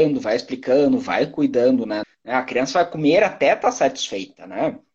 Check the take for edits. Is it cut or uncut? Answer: cut